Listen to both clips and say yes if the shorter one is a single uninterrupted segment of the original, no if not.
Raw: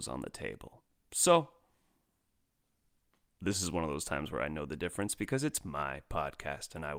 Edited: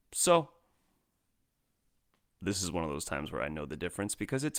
yes